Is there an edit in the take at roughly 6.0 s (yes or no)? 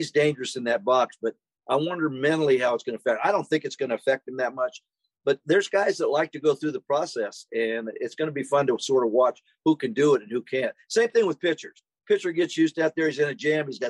no